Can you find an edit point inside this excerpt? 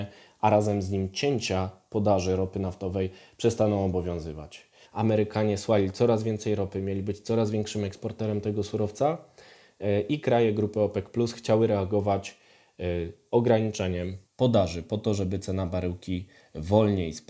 yes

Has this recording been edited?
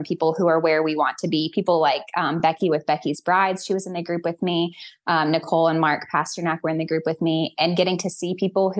no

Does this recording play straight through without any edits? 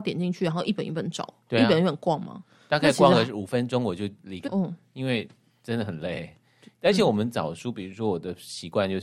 no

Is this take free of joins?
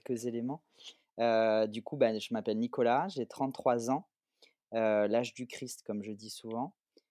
yes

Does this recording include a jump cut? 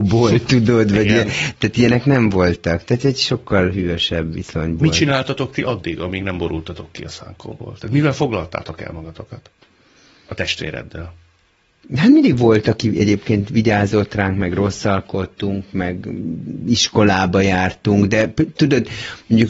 no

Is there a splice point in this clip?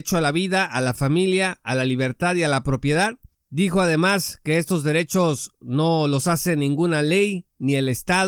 no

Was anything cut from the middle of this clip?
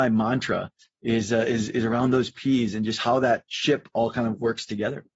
no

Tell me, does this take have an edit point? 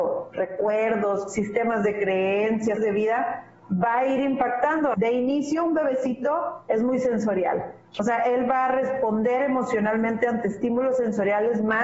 yes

